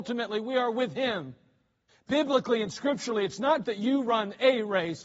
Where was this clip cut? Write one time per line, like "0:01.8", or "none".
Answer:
0:01.9
0:03.6

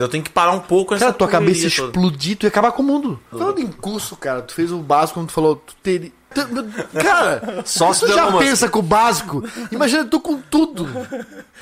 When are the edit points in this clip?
0:03.3
0:06.3

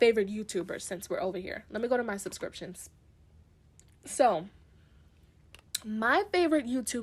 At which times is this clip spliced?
none

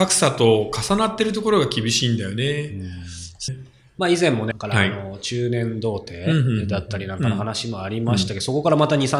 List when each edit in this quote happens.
0:03.5
0:04.5

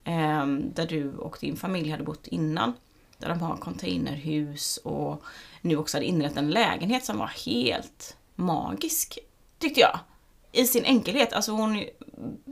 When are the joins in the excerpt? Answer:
none

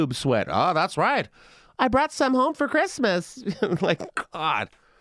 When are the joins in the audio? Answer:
none

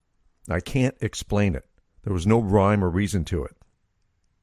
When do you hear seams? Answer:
none

